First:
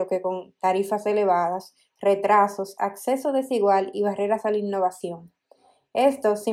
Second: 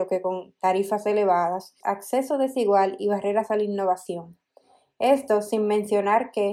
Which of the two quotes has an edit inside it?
second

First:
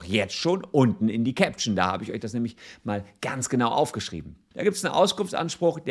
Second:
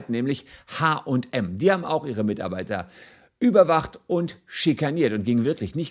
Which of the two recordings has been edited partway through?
first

